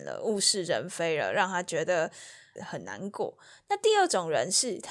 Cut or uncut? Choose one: cut